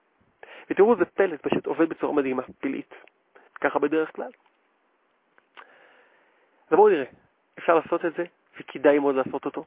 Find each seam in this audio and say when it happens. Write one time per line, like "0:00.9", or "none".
0:03.5
0:08.5